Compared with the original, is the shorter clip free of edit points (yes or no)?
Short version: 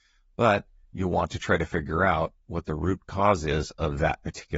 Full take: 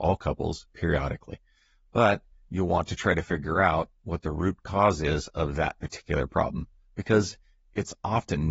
yes